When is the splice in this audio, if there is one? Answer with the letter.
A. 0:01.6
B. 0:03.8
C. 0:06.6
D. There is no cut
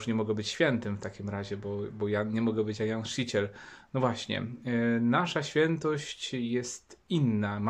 D